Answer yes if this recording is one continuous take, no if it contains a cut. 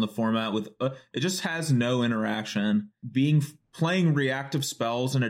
no